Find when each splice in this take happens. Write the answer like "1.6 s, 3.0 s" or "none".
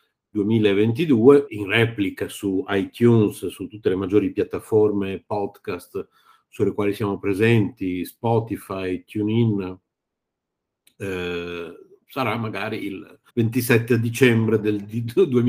1.5 s, 13.3 s